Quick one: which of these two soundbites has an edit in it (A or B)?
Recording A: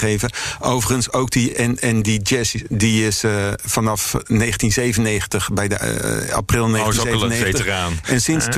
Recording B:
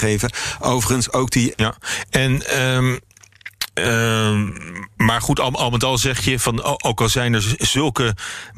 B